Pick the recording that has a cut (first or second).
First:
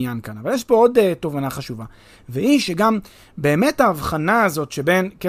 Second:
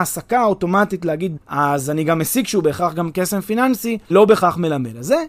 second